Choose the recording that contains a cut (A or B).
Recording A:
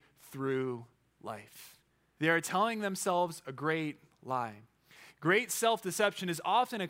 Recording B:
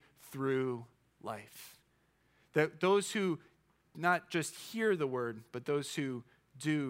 A